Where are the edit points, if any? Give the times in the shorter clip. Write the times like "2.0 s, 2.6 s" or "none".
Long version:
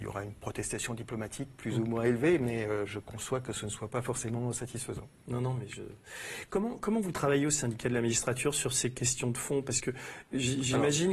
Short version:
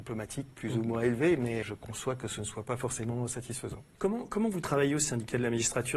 1.6 s, 4.0 s